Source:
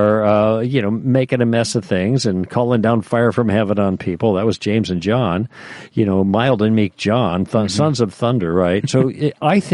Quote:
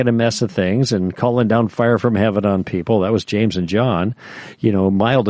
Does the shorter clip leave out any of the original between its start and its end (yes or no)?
no